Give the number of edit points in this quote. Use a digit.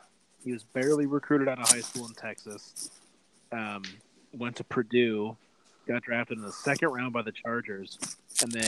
0